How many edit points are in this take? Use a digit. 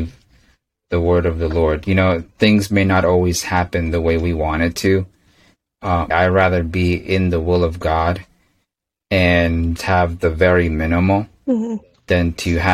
2